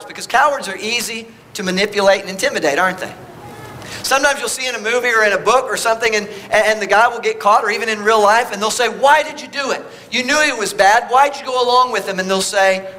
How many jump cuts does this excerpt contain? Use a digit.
0